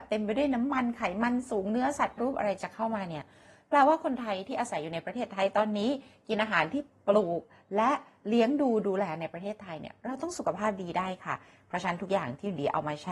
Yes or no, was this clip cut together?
yes